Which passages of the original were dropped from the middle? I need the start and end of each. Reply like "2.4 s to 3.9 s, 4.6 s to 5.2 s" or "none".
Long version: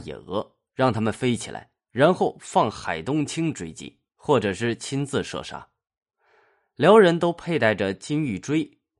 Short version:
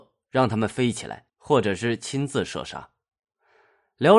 1.7 s to 4.1 s